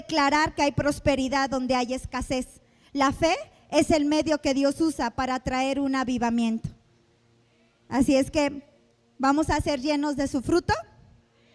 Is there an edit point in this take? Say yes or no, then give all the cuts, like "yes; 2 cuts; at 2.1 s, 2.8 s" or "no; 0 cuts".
no; 0 cuts